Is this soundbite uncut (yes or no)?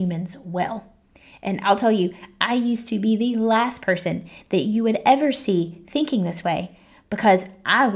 yes